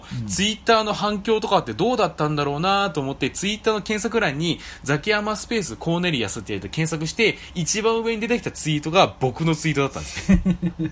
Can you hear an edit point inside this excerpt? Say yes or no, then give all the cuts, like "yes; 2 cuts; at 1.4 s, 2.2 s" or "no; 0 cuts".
no; 0 cuts